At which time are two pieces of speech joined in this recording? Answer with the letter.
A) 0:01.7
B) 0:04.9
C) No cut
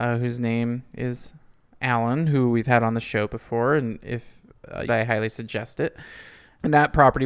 B